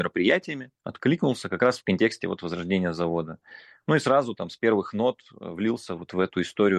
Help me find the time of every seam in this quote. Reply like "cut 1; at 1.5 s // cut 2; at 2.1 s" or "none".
none